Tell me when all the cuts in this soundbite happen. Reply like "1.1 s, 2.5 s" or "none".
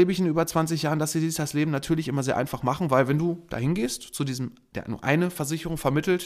none